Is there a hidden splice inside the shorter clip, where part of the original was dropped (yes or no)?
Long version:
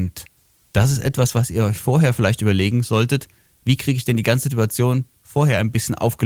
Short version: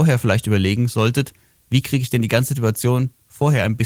no